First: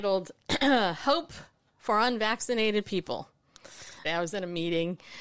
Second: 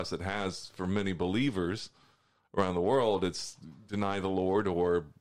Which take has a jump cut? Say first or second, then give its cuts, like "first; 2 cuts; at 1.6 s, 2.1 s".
first; 1 cut; at 4.0 s